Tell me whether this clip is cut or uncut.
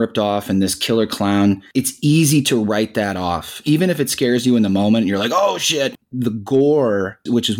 uncut